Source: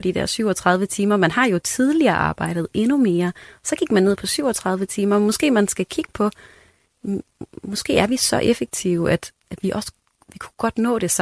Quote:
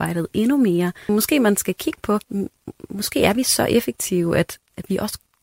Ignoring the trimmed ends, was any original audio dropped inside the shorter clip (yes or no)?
yes